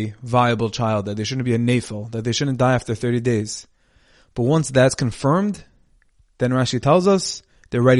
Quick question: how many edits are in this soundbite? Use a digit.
0